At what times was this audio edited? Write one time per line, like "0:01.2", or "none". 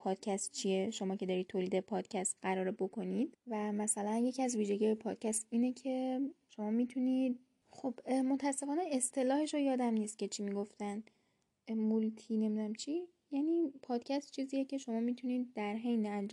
0:12.7

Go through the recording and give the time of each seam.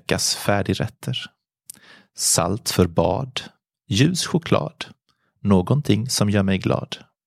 none

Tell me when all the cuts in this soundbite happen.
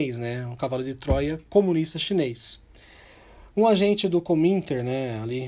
none

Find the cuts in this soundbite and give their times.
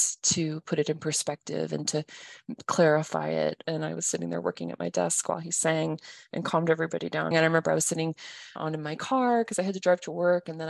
0:03.6
0:07.3
0:08.6

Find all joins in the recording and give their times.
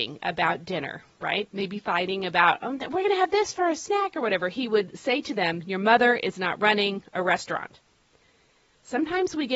0:01.5

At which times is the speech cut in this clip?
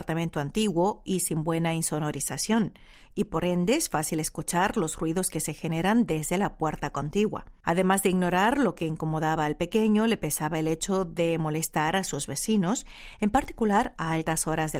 0:07.6

